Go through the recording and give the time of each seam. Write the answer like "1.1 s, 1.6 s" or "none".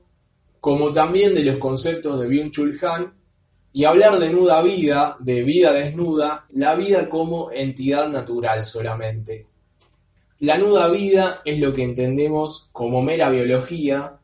6.5 s